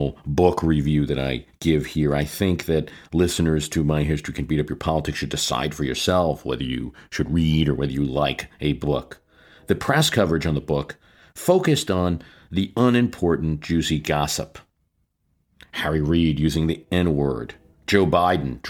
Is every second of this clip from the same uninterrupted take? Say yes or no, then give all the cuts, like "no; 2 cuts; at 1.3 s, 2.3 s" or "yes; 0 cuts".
yes; 0 cuts